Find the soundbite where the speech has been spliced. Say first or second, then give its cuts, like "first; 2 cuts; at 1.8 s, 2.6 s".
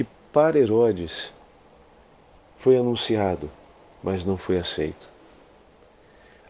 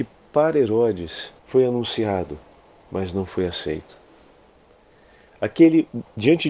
second; 1 cut; at 1.4 s